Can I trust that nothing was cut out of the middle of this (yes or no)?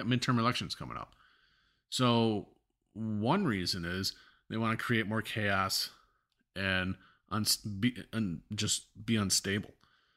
yes